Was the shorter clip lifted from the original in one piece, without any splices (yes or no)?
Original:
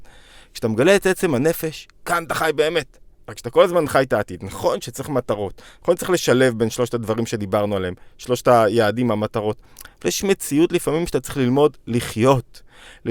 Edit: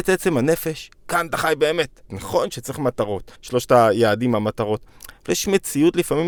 no